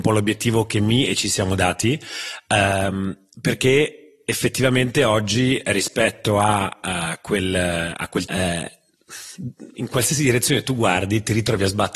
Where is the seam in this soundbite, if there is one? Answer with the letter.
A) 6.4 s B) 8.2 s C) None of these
B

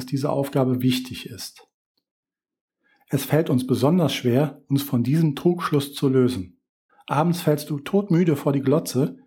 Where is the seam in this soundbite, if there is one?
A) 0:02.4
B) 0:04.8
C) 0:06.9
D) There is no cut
C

